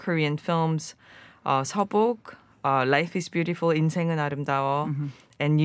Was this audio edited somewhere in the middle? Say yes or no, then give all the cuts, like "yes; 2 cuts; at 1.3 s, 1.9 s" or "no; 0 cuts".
no; 0 cuts